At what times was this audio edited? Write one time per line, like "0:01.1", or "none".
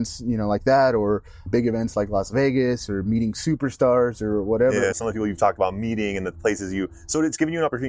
0:01.5
0:04.9